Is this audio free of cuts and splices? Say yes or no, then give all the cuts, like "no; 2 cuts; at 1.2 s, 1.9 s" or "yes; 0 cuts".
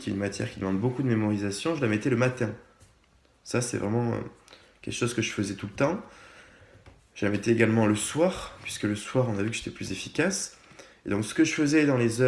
yes; 0 cuts